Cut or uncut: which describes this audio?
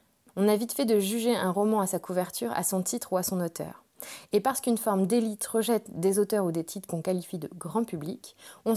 uncut